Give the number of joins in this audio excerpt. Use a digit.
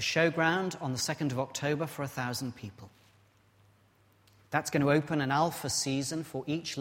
0